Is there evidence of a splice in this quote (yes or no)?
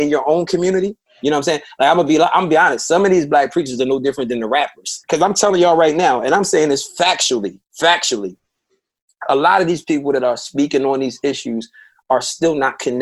yes